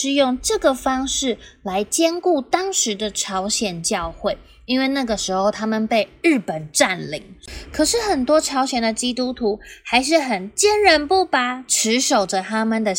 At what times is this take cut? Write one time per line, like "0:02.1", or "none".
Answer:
none